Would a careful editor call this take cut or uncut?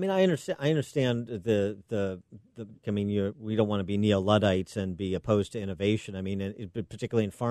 cut